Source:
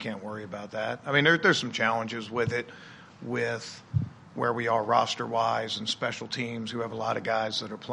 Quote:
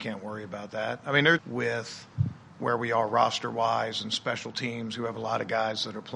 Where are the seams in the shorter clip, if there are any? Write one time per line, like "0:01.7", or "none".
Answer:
0:01.4